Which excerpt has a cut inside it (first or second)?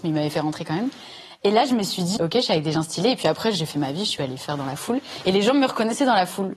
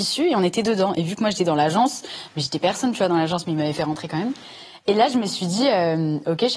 first